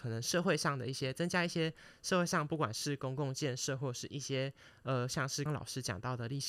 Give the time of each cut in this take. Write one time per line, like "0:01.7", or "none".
0:05.5